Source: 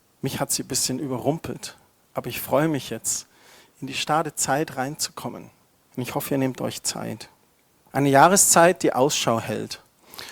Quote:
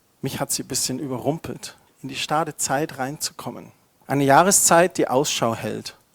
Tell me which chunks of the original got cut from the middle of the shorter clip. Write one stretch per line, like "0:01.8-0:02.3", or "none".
0:01.9-0:03.7
0:05.8-0:07.8